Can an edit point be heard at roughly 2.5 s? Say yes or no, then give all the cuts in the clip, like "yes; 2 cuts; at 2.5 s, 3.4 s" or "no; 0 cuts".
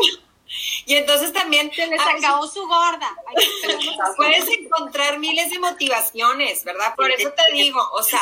no; 1 cut; at 6.9 s